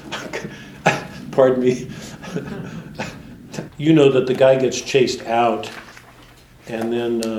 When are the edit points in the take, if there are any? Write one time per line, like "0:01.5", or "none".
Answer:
0:03.7